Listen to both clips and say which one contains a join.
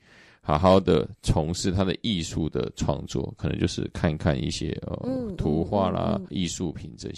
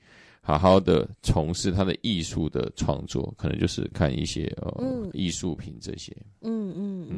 second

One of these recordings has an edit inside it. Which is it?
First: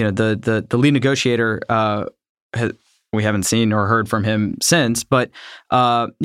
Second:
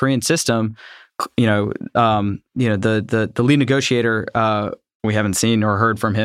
second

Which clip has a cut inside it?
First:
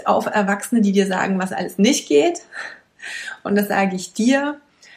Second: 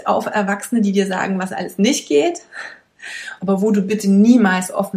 second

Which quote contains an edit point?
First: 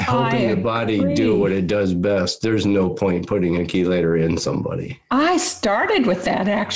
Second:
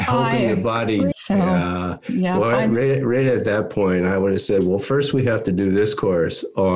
second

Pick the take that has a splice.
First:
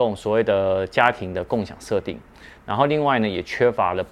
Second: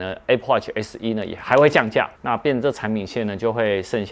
second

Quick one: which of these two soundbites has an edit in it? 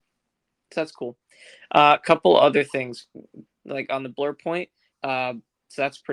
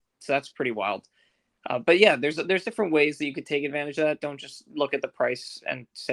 first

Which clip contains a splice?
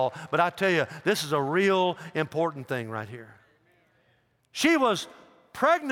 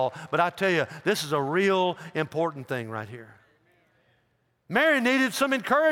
first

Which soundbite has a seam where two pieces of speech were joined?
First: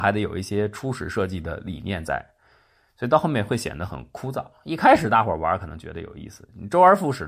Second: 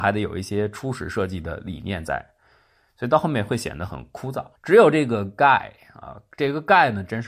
second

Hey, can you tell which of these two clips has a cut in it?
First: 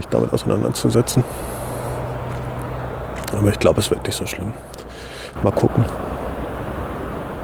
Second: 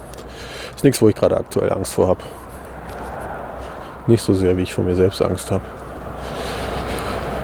first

